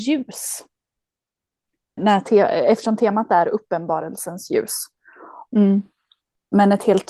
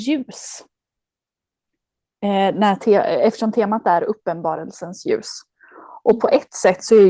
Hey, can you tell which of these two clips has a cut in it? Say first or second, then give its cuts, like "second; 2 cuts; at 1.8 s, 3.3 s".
first; 2 cuts; at 2.0 s, 5.5 s